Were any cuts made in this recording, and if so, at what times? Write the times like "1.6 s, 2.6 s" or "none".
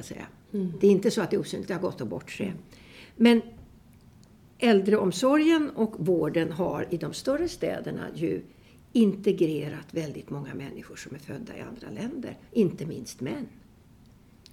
none